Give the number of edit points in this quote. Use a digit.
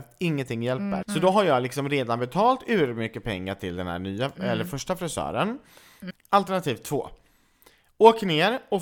2